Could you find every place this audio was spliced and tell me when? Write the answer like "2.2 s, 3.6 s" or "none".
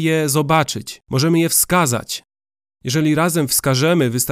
1.0 s